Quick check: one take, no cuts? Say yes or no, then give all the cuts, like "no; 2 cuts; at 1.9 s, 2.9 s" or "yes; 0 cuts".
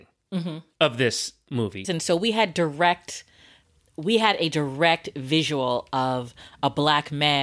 no; 1 cut; at 1.8 s